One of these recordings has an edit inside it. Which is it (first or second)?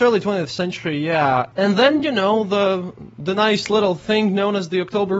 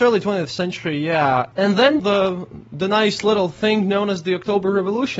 second